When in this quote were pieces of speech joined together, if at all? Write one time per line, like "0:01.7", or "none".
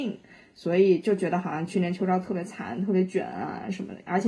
none